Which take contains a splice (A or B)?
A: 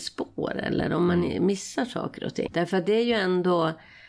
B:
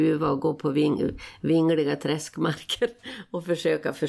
A